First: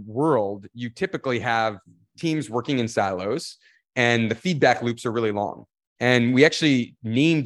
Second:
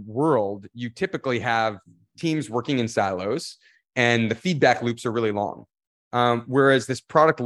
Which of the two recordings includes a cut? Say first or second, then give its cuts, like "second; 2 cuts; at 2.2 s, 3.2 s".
first; 1 cut; at 6.0 s